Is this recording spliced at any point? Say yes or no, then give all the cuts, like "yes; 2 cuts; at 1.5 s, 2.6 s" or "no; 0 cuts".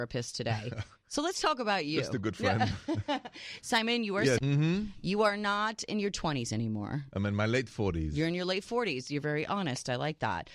yes; 1 cut; at 4.4 s